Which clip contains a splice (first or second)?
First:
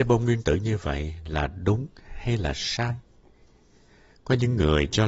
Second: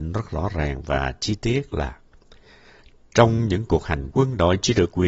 second